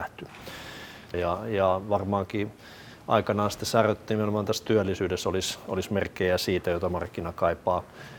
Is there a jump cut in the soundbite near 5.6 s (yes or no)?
no